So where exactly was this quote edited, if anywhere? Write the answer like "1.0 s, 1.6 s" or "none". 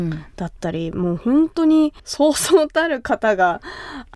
2.0 s